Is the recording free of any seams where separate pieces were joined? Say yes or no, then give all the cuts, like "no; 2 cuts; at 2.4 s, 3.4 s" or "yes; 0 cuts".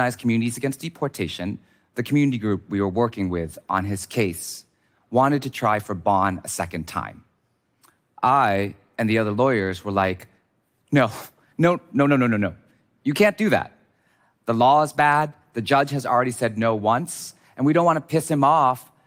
yes; 0 cuts